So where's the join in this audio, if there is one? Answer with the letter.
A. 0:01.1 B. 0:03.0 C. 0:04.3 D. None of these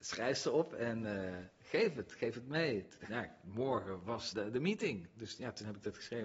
D